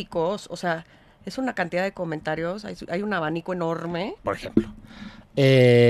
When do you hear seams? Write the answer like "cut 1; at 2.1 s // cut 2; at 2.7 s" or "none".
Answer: cut 1; at 4.2 s